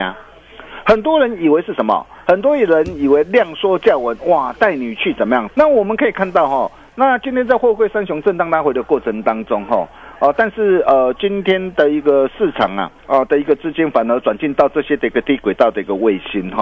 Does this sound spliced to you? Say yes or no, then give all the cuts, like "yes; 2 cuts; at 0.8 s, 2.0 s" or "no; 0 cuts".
yes; 2 cuts; at 5.5 s, 13.0 s